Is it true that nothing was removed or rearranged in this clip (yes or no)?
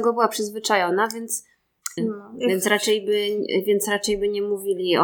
no